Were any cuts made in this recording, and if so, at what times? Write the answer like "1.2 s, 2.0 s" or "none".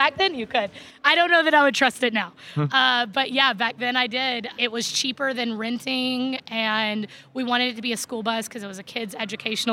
none